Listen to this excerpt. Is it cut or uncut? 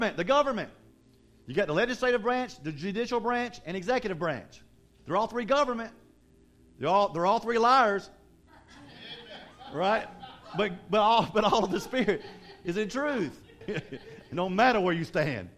cut